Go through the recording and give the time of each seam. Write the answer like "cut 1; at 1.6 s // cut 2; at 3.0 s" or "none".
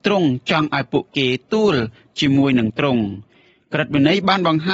cut 1; at 1.4 s